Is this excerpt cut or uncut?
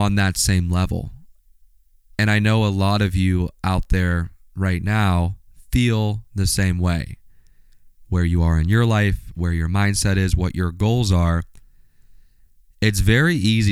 uncut